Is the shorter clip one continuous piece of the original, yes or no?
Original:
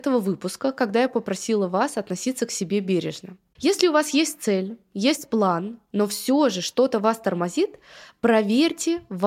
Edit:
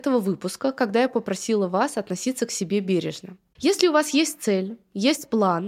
yes